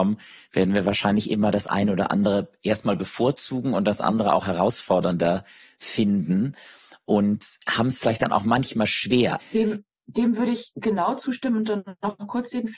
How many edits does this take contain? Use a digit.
2